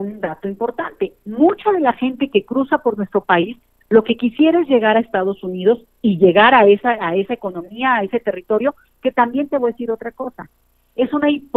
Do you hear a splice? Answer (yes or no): no